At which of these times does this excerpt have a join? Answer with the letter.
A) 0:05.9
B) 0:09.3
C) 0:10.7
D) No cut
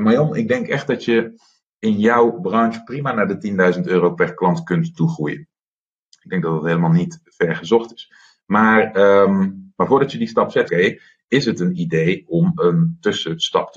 C